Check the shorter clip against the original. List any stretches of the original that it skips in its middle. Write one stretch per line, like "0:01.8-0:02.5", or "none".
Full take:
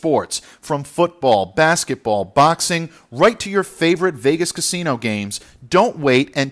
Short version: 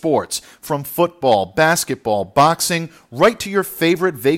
none